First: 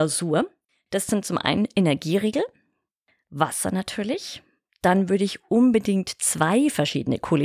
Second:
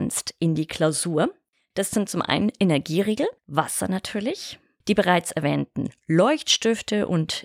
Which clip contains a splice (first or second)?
second